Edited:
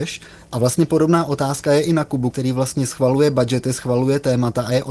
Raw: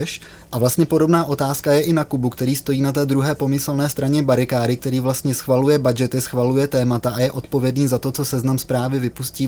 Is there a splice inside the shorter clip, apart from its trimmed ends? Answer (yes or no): yes